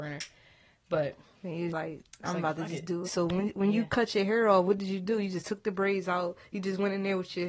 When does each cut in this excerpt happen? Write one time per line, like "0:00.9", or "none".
0:01.7
0:03.0